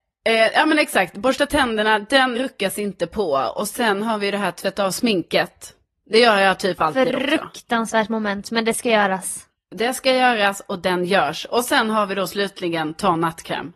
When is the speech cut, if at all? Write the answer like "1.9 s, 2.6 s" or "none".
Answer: 2.3 s